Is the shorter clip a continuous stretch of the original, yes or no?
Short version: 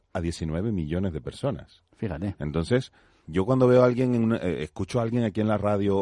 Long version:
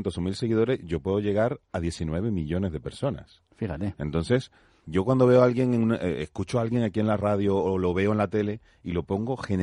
yes